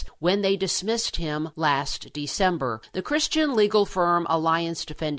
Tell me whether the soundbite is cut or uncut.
uncut